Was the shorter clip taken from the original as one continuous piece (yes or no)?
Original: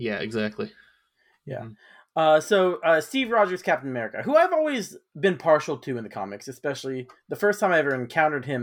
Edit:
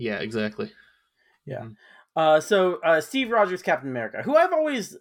yes